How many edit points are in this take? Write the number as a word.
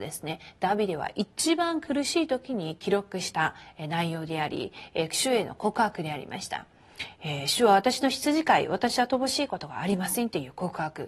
zero